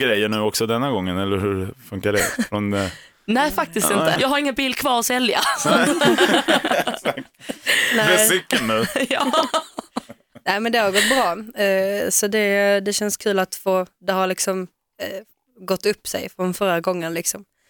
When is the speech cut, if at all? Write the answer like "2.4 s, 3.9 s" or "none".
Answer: 4.2 s